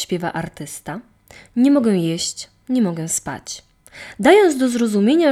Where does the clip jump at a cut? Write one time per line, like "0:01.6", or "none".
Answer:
none